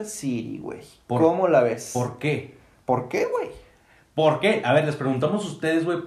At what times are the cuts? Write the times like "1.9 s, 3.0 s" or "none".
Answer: none

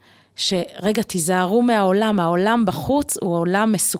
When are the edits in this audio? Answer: none

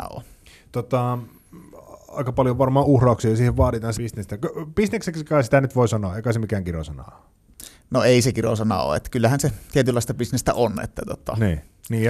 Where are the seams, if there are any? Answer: 3.9 s

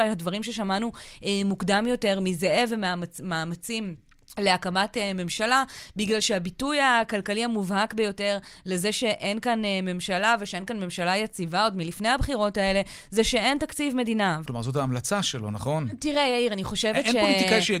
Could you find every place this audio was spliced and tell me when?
14.4 s

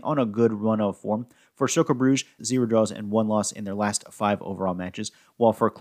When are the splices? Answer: 2.4 s

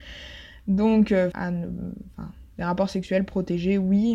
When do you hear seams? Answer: 1.3 s

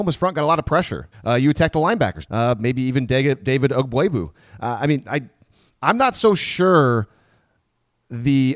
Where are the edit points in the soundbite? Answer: 1.1 s, 2.3 s

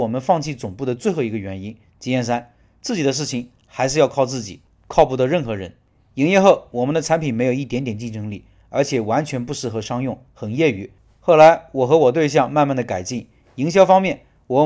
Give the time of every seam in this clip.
1.8 s

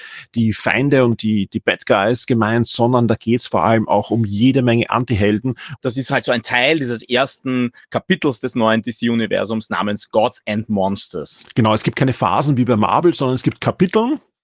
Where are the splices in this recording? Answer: 5.8 s

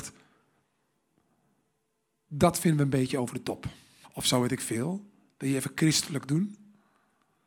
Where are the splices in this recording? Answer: 4.0 s

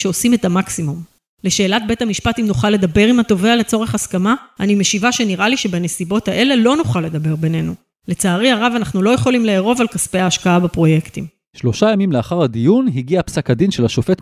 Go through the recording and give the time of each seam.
none

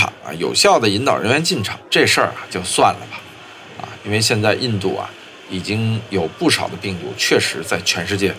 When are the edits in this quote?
4.0 s

